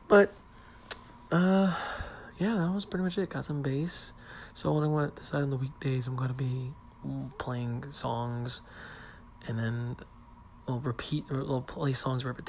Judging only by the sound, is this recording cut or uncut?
uncut